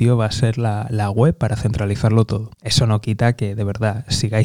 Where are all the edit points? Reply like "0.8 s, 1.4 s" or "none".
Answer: 2.5 s